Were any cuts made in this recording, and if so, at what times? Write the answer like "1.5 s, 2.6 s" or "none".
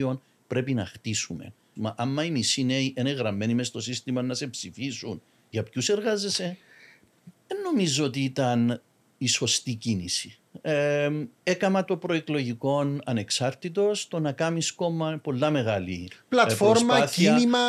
1.8 s, 7.3 s